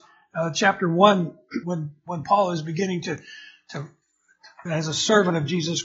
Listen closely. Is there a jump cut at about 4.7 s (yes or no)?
yes